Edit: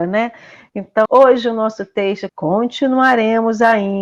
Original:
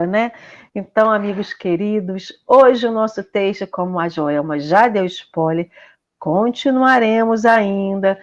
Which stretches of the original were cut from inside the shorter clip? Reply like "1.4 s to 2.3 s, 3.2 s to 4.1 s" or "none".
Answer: 1.1 s to 2.4 s, 3.7 s to 6.1 s